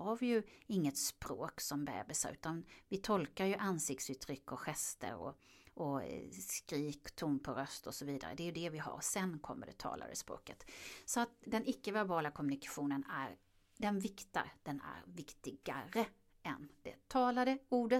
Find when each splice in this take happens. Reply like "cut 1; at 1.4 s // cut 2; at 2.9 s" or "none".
cut 1; at 11.5 s